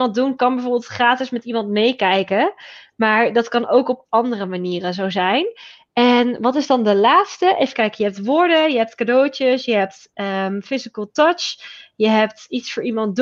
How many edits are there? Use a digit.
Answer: 0